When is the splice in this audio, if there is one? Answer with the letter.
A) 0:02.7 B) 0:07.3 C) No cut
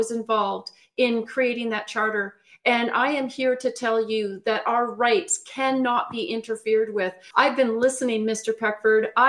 B